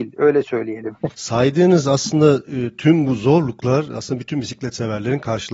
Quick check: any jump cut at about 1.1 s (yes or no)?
yes